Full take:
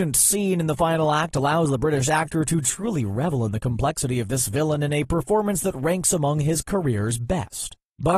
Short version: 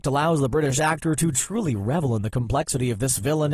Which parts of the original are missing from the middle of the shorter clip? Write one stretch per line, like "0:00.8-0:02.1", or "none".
none